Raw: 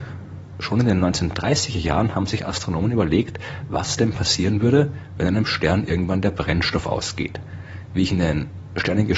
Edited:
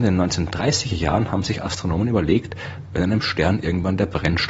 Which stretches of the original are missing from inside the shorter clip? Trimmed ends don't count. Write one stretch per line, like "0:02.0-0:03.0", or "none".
0:03.7-0:05.1